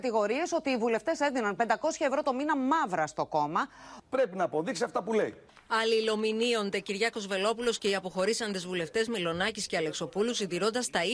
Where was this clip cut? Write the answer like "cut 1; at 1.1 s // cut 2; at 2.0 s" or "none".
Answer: cut 1; at 4.0 s